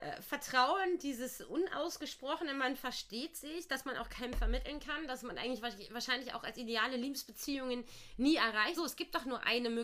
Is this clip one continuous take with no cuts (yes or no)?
no